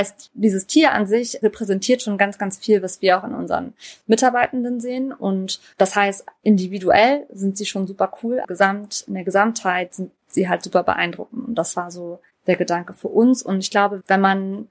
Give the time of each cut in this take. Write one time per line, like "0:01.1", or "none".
0:08.4